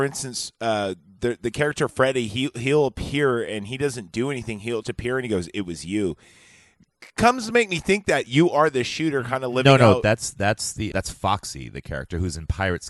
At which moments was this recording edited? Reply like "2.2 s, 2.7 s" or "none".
4.8 s, 10.9 s